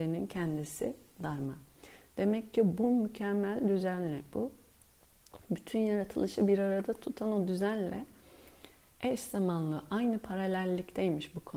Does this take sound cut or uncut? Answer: uncut